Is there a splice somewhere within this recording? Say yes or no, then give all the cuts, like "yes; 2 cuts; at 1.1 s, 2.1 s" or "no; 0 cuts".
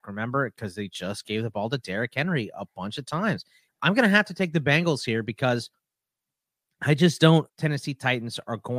yes; 2 cuts; at 3.7 s, 7.5 s